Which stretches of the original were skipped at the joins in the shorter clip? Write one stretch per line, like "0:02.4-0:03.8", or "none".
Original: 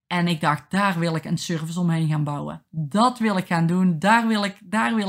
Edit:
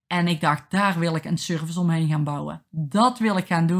none